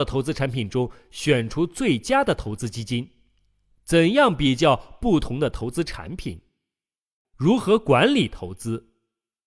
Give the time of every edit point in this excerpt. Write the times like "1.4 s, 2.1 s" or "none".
7.2 s